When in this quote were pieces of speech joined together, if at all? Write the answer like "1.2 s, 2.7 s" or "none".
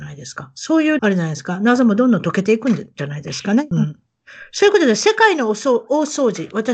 1.0 s, 3.7 s